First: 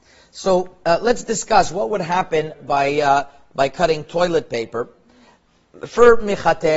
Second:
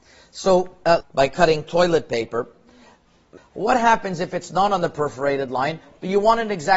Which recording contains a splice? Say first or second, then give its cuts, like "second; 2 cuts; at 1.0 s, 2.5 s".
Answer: second; 2 cuts; at 1.0 s, 3.4 s